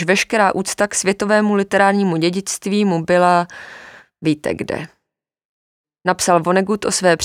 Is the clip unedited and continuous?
no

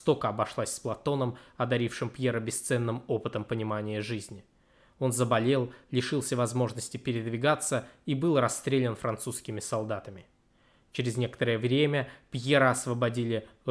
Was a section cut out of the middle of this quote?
no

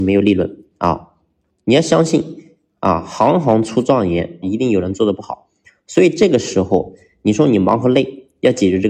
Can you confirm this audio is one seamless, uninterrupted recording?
no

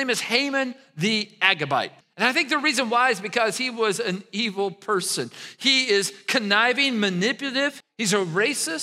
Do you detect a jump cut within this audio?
yes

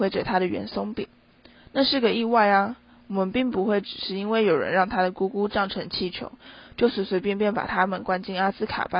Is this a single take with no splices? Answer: yes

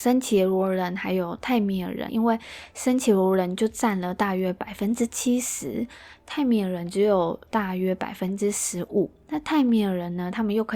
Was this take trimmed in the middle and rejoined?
yes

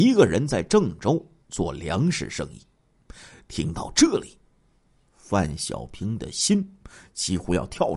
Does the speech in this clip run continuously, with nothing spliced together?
yes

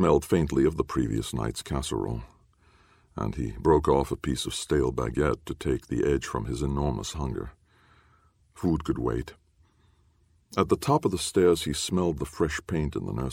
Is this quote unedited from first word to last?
yes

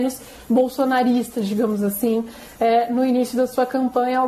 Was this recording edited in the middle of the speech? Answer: no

